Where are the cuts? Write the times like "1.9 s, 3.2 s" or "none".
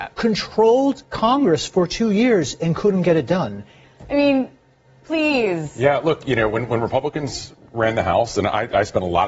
3.8 s